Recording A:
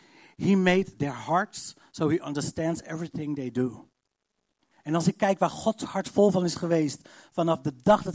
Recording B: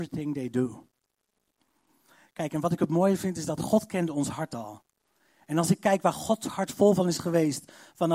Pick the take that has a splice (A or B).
A